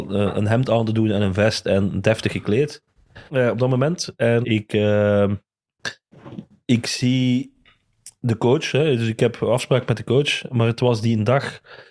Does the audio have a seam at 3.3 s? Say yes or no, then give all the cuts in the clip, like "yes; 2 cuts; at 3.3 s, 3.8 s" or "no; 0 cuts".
yes; 2 cuts; at 3.3 s, 4.4 s